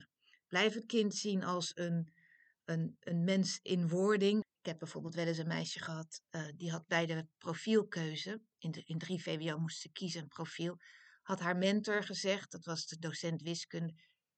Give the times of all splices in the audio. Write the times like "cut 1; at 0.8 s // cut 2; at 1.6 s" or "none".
cut 1; at 4.4 s